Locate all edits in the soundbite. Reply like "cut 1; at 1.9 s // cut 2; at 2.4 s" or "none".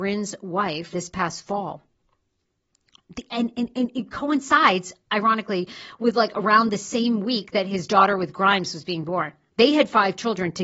cut 1; at 0.9 s // cut 2; at 9.5 s

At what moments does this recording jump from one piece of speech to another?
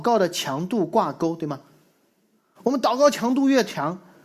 none

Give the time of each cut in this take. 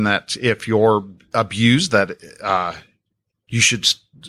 none

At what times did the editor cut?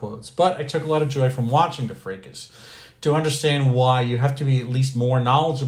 none

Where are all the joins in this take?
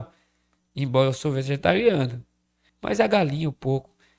cut 1; at 2.7 s

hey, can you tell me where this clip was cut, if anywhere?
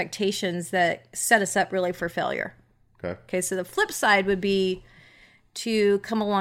none

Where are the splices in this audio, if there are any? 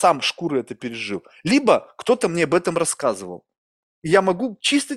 none

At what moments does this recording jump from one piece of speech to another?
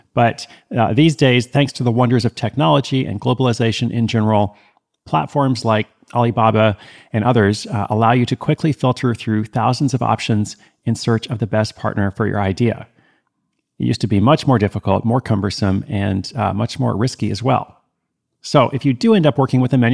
none

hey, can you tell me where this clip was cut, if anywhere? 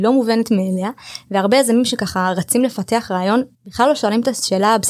cut 1; at 3.5 s

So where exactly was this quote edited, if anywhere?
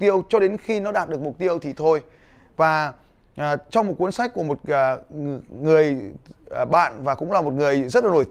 none

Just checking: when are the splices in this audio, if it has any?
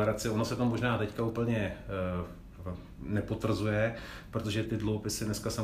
cut 1; at 4.6 s

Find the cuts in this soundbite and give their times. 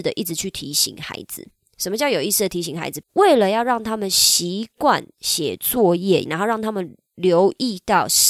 cut 1; at 3.0 s // cut 2; at 6.2 s

